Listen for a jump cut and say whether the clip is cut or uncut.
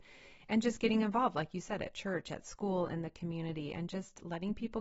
uncut